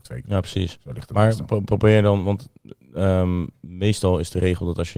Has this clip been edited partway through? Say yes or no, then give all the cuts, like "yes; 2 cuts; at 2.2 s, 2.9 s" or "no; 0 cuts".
no; 0 cuts